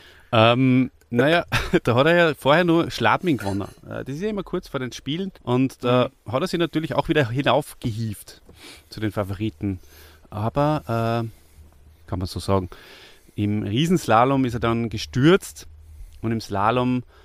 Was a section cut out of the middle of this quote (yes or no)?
yes